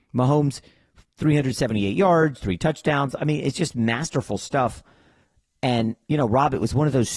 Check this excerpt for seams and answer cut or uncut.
uncut